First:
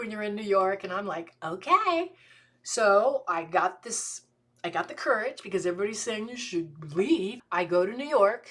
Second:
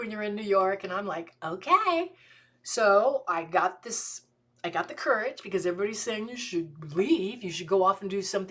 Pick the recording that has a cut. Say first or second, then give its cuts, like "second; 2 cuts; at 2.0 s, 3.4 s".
first; 1 cut; at 7.4 s